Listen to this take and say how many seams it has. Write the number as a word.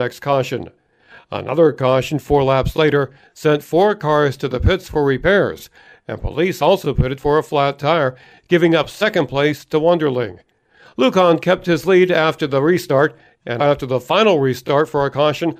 one